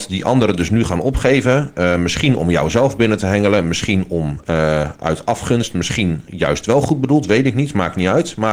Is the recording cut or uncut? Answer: uncut